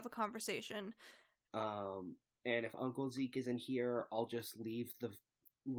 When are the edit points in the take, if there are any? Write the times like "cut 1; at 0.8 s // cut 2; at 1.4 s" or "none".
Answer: cut 1; at 1.5 s